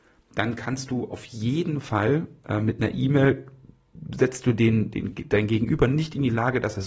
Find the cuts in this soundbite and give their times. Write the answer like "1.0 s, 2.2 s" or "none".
none